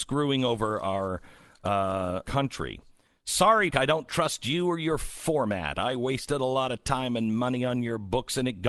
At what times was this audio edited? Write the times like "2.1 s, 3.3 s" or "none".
2.2 s, 3.7 s